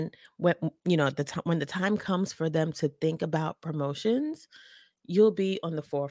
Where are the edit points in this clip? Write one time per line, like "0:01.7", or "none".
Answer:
none